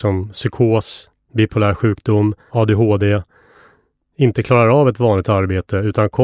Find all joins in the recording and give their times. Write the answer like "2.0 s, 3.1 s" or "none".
2.5 s